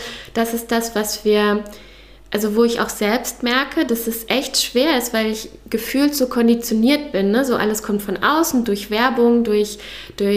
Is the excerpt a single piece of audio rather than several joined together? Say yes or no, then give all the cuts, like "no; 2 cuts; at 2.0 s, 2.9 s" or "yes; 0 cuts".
yes; 0 cuts